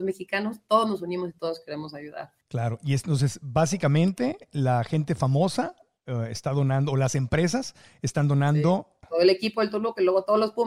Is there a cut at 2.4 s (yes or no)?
no